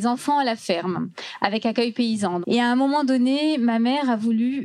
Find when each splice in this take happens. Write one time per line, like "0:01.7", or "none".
0:02.4